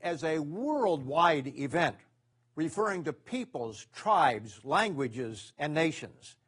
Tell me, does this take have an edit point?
no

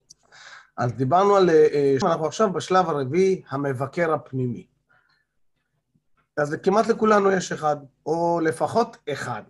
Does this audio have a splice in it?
yes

